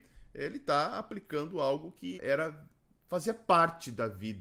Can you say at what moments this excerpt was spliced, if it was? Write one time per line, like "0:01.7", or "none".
0:02.2